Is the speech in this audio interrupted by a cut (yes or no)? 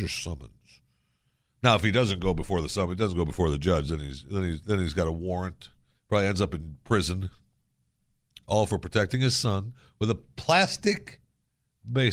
no